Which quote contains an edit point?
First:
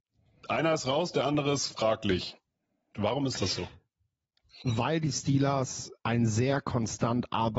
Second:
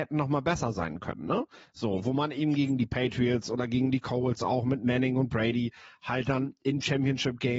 first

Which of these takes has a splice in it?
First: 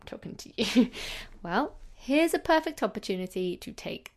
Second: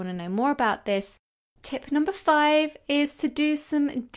second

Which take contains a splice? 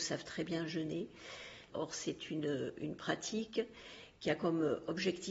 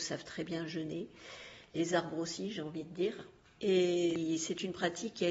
first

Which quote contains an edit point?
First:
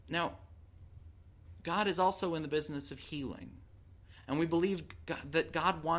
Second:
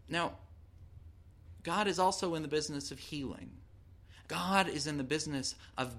second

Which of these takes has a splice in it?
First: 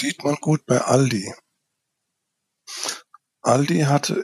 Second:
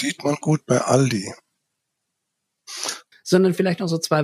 second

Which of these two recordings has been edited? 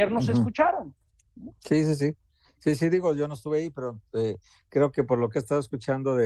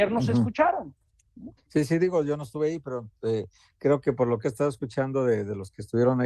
second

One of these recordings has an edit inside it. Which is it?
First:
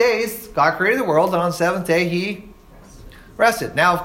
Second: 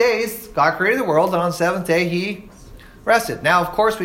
second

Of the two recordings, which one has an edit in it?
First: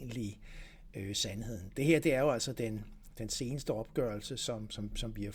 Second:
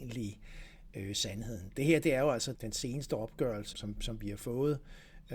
second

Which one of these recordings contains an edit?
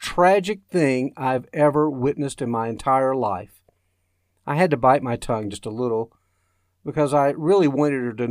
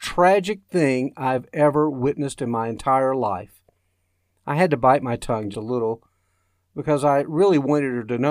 second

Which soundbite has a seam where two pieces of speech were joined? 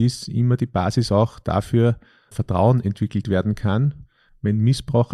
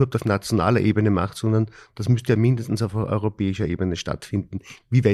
first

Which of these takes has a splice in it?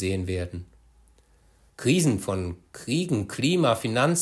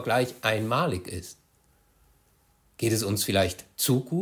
first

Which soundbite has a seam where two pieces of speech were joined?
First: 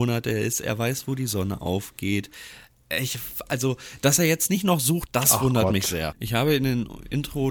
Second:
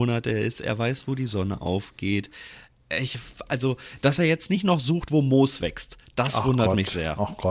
first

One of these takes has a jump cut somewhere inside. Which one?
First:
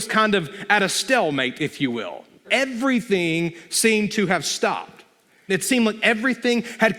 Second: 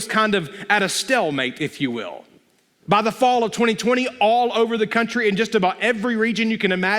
first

